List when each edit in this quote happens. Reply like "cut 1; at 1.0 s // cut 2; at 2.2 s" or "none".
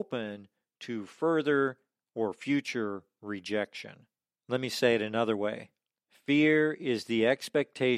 none